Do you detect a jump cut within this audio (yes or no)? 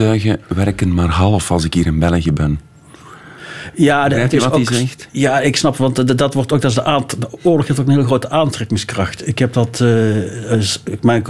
no